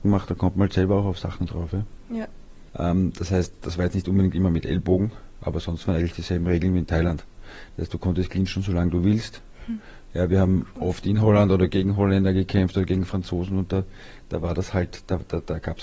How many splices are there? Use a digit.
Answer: 1